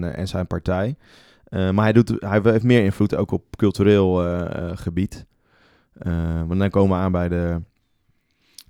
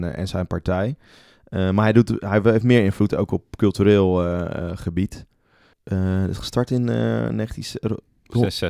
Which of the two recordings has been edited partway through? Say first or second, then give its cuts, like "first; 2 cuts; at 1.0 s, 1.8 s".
second; 1 cut; at 5.7 s